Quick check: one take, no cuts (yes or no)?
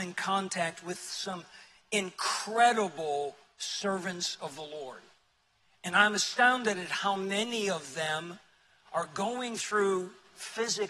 yes